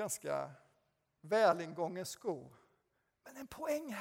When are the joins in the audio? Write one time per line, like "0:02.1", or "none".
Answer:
0:03.1